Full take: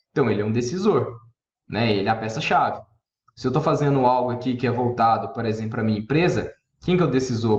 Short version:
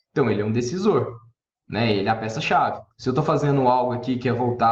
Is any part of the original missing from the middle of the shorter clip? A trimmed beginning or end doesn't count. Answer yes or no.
yes